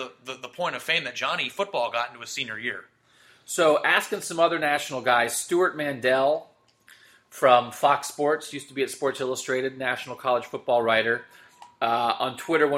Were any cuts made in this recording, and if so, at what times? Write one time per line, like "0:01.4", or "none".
none

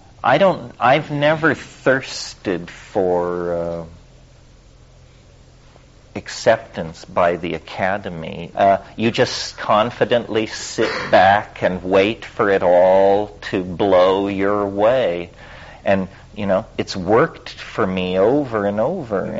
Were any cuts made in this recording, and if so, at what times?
0:08.5

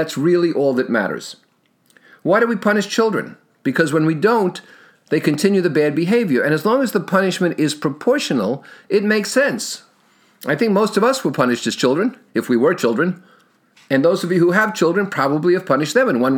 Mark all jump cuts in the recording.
none

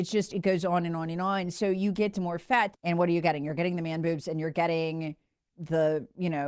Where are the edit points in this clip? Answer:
0:02.7
0:05.5

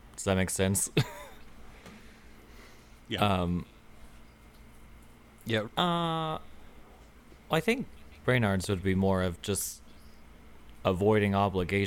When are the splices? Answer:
0:03.0
0:05.6

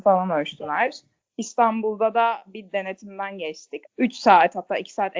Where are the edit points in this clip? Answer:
0:03.9

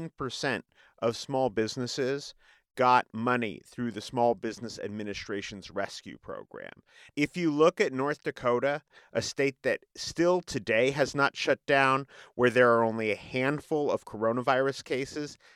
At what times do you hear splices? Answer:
none

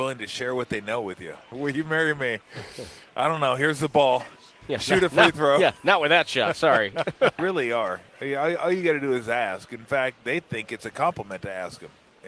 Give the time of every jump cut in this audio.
0:01.5
0:07.4

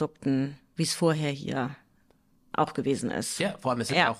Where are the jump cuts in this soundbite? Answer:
none

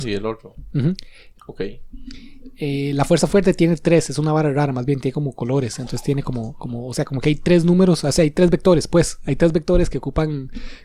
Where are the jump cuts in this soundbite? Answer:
0:01.4

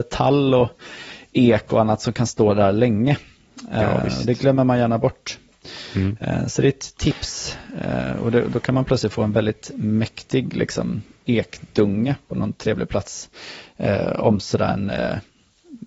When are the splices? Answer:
none

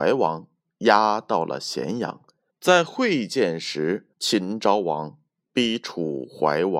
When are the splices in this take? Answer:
0:02.5
0:04.1

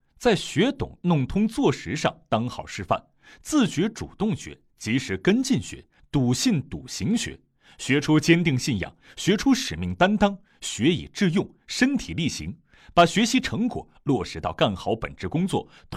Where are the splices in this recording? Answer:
0:06.0

